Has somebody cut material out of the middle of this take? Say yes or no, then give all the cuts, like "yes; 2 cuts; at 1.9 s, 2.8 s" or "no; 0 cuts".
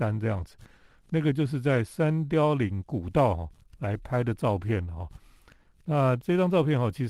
no; 0 cuts